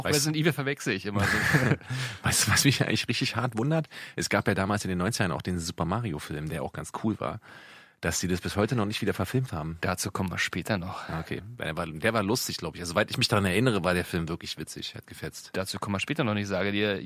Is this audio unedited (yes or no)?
yes